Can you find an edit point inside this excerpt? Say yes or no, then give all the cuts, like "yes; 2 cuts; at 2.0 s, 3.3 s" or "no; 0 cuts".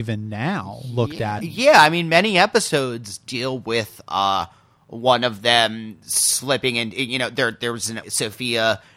yes; 2 cuts; at 1.4 s, 8.0 s